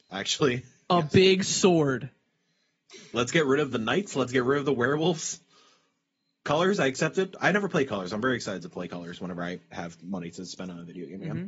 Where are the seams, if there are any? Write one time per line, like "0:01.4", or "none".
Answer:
none